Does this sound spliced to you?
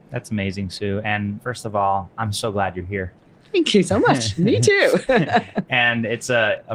no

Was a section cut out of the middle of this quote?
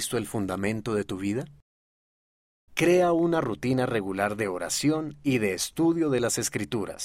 yes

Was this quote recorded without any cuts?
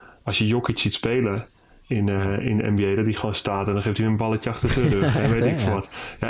yes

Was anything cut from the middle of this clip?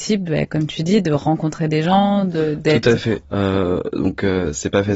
yes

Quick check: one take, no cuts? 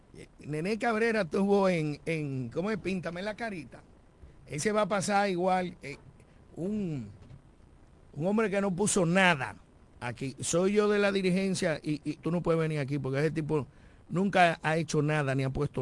no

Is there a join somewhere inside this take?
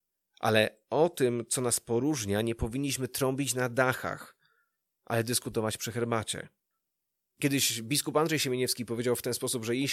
no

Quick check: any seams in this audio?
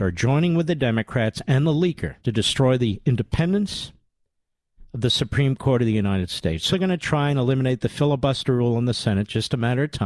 yes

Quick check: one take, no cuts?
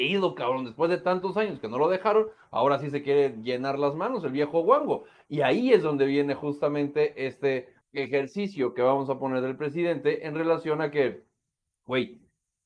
no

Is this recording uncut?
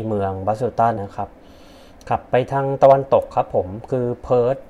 no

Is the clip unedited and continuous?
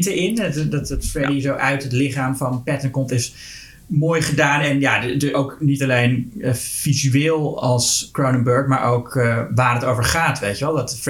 yes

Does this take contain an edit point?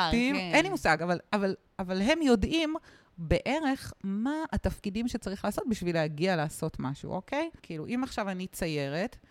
yes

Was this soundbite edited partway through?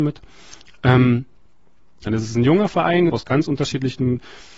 yes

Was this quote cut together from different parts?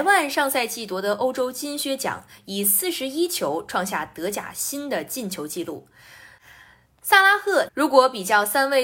yes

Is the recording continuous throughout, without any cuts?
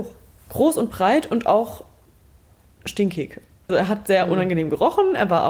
no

